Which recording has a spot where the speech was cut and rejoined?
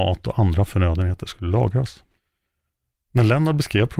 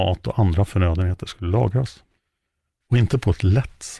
second; 1 cut; at 2.8 s

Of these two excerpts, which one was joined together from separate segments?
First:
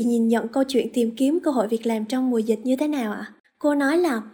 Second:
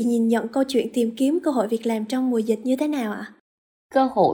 first; 1 cut; at 3.4 s

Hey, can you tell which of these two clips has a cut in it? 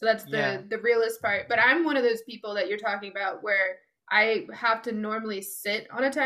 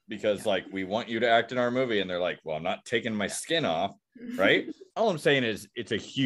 second; 1 cut; at 4.9 s

